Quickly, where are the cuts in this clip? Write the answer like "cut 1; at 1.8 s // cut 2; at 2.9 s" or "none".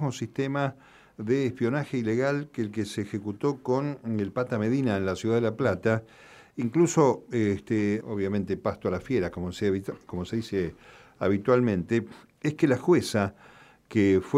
cut 1; at 8.0 s